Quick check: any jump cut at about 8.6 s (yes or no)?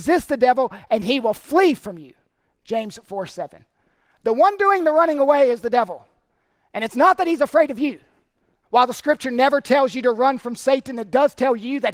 yes